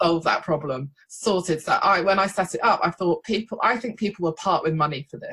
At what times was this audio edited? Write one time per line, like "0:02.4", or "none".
none